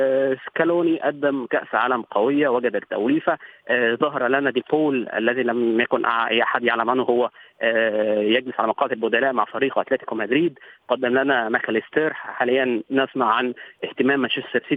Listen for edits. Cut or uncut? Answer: uncut